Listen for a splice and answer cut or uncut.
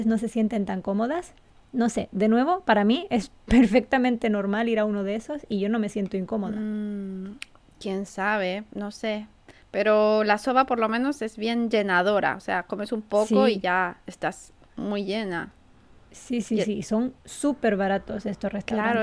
uncut